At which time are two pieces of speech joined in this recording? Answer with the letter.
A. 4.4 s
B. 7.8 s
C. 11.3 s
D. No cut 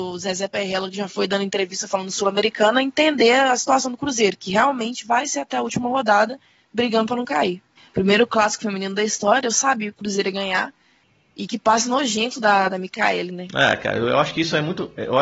B